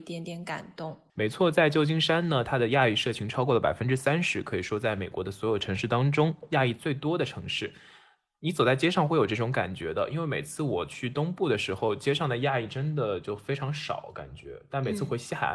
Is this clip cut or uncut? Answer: uncut